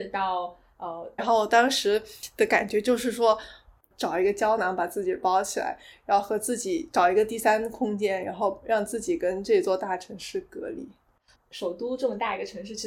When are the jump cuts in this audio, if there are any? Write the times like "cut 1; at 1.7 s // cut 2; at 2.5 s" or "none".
cut 1; at 1.2 s // cut 2; at 11.3 s